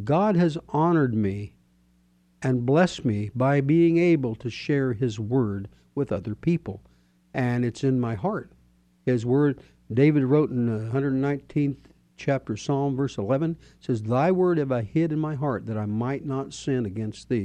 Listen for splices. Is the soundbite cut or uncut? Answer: uncut